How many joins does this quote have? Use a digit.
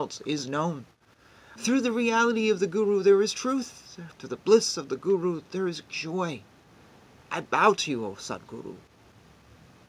2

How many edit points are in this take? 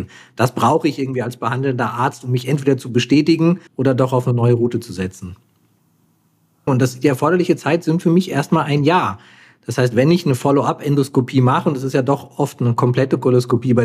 2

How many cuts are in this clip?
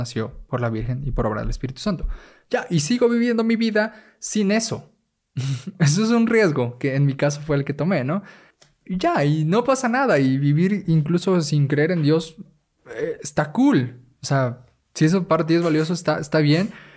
0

